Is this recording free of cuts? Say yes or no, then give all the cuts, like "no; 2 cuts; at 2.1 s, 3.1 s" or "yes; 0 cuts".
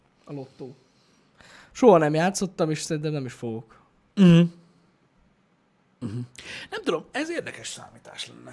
yes; 0 cuts